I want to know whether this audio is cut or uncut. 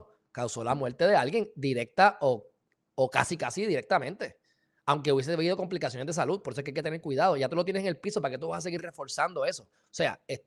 uncut